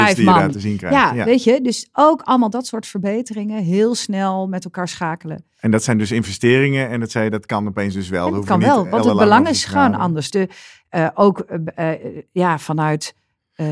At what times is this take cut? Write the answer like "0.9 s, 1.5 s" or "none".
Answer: 10.3 s